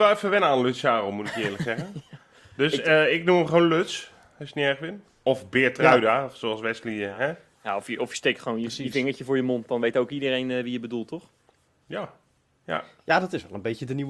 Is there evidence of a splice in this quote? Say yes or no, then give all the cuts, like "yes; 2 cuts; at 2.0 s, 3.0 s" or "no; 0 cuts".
no; 0 cuts